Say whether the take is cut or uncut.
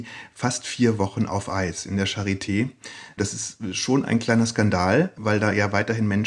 uncut